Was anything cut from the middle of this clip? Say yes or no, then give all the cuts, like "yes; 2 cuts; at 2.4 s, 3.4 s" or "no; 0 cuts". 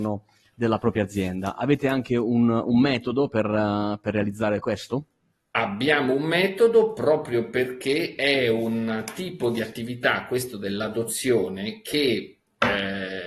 no; 0 cuts